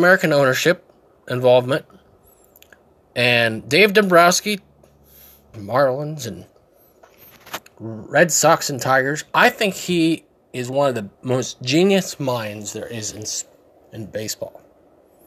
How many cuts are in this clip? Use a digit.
2